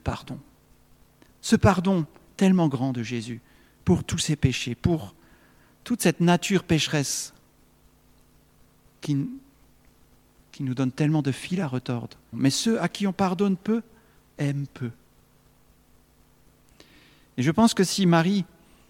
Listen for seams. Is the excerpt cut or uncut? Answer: cut